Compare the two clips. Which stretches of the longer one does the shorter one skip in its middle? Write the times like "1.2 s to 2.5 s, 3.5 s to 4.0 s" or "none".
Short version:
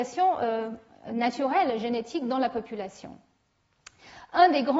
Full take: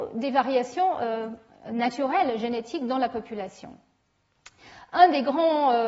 none